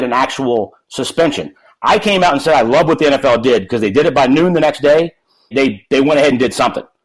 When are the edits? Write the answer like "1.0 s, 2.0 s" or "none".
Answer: 5.5 s